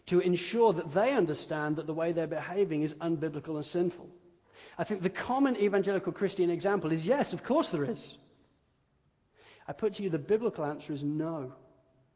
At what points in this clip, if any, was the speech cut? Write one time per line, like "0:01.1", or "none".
none